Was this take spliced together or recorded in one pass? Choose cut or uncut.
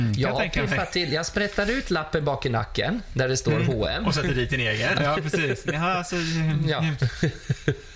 cut